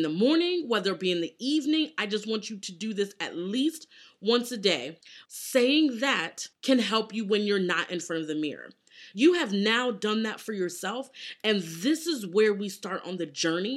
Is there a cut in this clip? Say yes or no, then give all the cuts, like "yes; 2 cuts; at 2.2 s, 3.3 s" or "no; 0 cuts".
yes; 2 cuts; at 5.3 s, 9.1 s